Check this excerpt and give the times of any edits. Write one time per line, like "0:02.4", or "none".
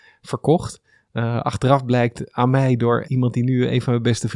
0:03.0